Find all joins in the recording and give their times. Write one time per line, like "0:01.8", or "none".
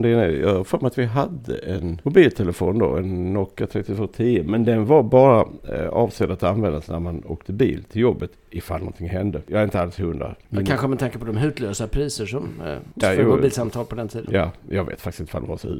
0:13.0